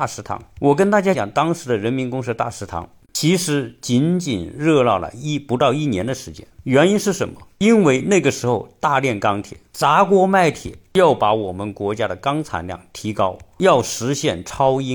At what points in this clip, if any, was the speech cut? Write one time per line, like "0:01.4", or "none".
0:01.1